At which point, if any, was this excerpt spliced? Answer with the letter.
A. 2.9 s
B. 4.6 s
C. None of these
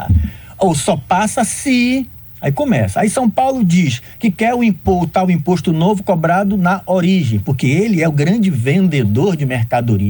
C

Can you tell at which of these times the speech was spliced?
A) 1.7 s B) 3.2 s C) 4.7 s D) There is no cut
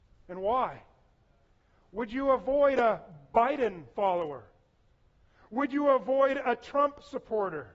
D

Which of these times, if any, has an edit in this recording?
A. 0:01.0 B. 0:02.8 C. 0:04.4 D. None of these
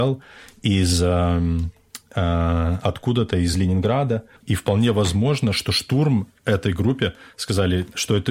C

